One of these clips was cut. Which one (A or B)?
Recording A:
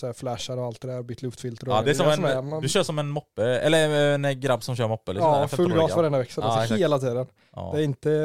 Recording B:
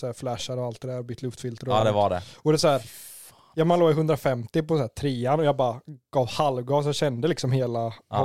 A